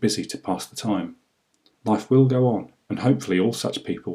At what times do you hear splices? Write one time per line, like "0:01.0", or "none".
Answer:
0:01.7